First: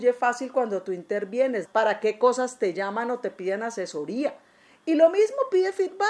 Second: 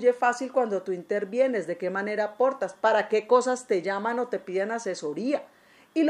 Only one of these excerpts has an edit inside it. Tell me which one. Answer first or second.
first